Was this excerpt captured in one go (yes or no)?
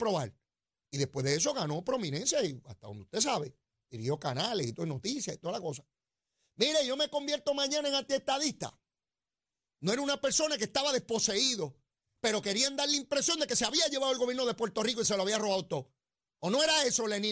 no